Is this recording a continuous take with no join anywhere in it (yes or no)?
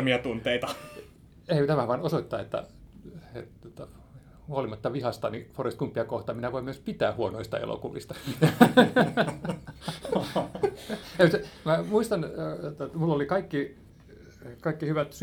yes